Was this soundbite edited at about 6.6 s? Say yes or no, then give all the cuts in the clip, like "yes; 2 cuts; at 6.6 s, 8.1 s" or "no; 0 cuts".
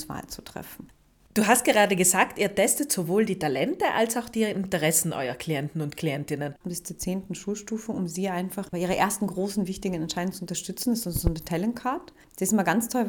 yes; 1 cut; at 6.6 s